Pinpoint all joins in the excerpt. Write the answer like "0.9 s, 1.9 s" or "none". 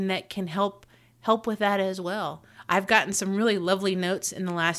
none